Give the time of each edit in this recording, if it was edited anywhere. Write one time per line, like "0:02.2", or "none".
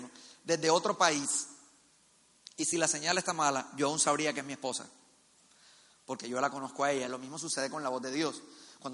none